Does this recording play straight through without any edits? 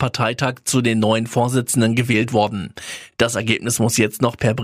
yes; 0 cuts

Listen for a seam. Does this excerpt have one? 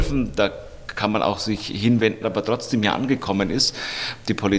yes; 1 cut; at 2.2 s

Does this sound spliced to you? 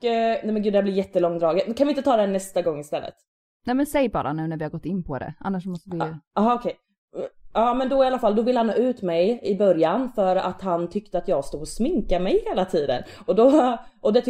no; 0 cuts

